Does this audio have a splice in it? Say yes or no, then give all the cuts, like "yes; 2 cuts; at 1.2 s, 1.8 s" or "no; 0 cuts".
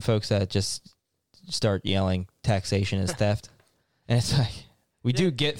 no; 0 cuts